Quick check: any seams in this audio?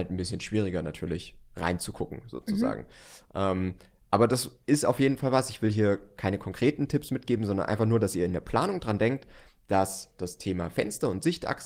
no; 0 cuts

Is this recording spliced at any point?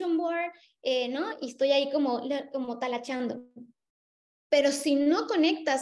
no; 0 cuts

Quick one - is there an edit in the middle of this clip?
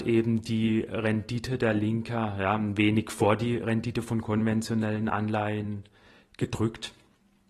no; 0 cuts

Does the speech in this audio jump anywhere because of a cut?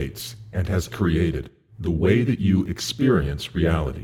yes; 1 cut; at 0.9 s

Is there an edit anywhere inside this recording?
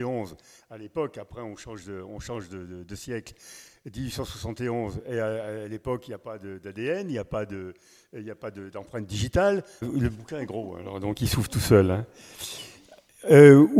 yes; 1 cut; at 9.8 s

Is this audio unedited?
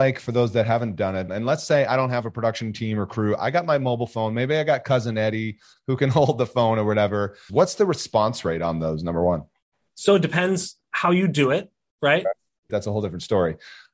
no; 3 cuts; at 1.3 s, 7.5 s, 12.7 s

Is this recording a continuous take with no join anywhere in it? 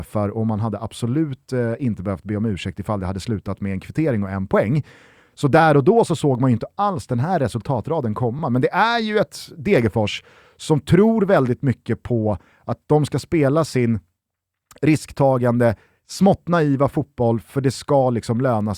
yes; 0 cuts

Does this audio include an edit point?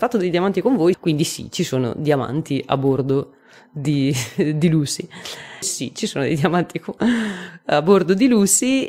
yes; 2 cuts; at 0.9 s, 5.6 s

